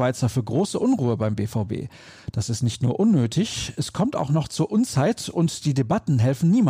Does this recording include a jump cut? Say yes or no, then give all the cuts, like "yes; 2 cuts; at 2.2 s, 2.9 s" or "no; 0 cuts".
no; 0 cuts